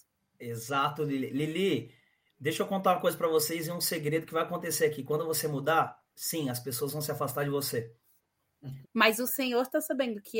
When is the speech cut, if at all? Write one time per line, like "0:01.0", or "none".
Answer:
0:08.8